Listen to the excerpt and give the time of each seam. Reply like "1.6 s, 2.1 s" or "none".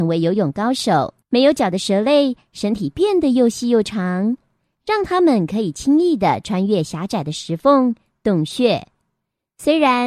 1.2 s